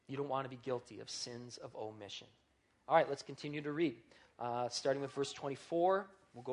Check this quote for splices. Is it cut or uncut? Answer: uncut